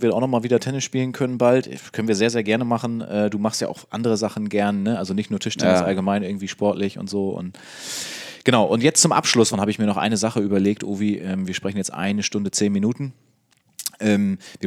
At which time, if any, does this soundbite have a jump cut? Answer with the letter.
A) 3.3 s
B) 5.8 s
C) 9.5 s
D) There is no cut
C